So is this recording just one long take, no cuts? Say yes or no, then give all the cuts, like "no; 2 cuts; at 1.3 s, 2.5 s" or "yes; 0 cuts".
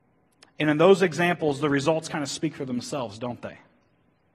yes; 0 cuts